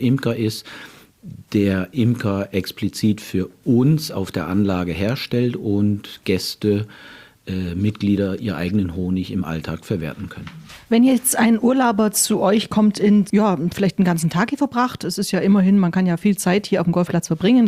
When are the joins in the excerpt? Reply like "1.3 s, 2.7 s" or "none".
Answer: 13.3 s